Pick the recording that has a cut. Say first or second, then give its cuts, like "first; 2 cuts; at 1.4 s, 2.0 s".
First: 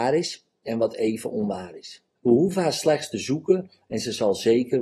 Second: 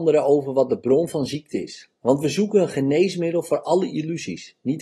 first; 1 cut; at 2.2 s